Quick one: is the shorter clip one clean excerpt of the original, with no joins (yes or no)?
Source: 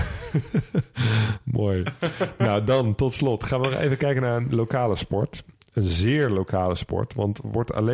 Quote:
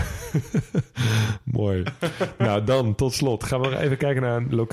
yes